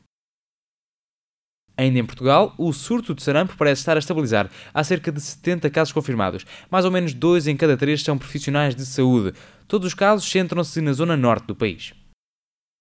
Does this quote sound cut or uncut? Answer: uncut